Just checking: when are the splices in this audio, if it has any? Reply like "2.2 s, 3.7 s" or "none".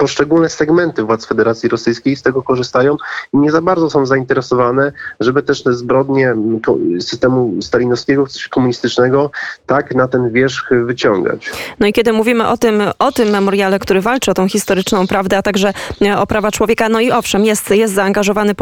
13.8 s